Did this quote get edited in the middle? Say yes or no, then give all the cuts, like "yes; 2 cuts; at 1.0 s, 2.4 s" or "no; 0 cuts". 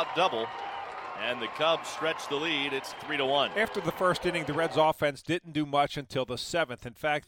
yes; 1 cut; at 2.9 s